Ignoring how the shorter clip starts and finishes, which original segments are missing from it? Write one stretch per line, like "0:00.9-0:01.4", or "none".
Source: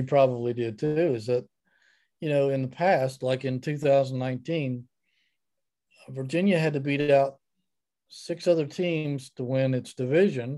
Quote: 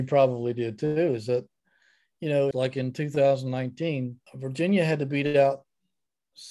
0:02.5-0:03.2
0:04.9-0:06.0

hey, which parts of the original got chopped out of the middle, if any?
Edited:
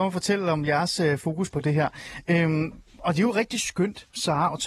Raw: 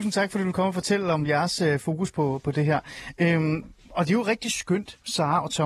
0:02.1-0:02.4

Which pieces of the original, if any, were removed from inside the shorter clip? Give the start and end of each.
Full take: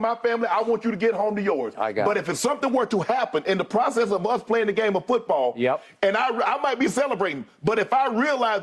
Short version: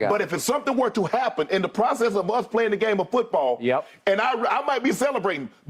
none

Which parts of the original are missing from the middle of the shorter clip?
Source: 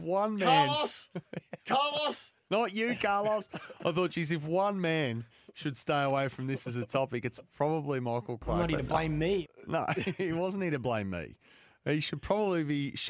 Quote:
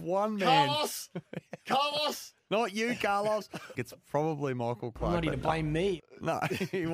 0:03.7-0:07.2

